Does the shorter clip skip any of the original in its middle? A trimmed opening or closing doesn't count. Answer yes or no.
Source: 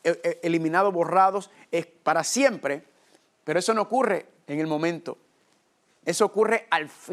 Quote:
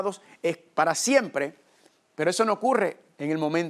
no